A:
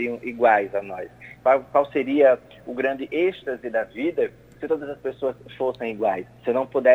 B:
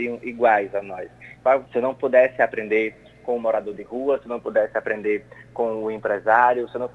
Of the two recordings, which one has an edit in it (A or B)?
B